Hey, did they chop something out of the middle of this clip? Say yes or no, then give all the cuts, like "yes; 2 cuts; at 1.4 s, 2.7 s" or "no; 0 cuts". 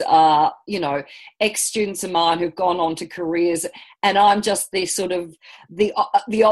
no; 0 cuts